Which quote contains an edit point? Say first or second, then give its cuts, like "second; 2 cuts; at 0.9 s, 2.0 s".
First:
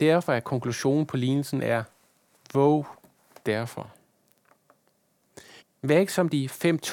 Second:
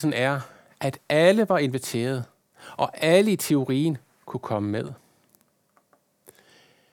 first; 1 cut; at 5.6 s